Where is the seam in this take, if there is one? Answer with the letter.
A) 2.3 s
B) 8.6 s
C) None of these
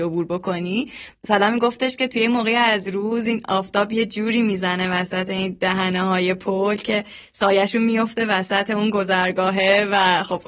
C